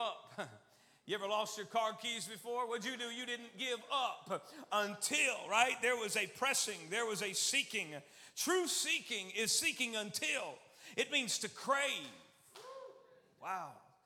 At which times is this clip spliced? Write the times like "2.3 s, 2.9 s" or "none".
none